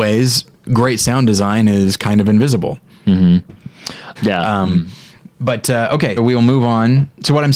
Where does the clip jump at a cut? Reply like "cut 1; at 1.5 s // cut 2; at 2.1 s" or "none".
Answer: cut 1; at 4.2 s // cut 2; at 6.2 s